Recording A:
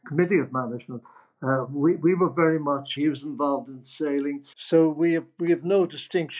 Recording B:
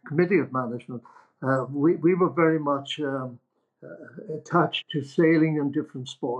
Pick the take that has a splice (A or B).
A